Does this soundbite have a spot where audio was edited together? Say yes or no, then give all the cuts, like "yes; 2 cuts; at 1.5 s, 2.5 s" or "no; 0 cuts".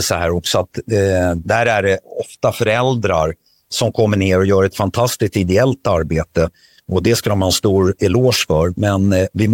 no; 0 cuts